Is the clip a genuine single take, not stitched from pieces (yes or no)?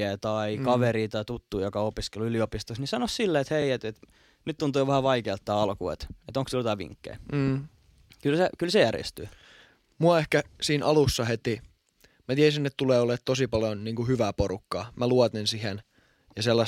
yes